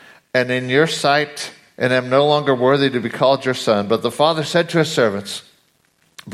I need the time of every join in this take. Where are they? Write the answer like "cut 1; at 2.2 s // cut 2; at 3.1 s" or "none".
none